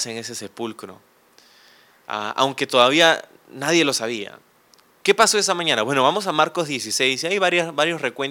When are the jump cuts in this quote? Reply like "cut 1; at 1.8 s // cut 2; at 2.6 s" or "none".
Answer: none